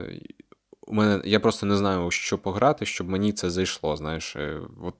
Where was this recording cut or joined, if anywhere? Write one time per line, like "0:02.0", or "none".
none